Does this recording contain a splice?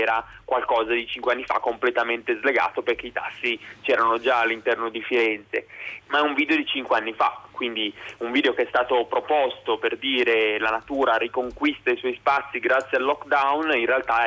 yes; 1 cut; at 6.0 s

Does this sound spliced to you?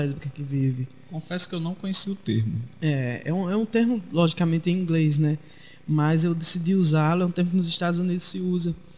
no; 0 cuts

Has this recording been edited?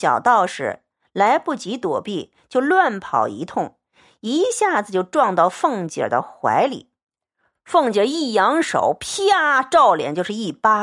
no; 0 cuts

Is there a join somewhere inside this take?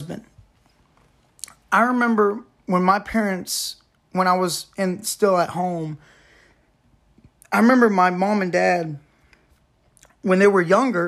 no; 0 cuts

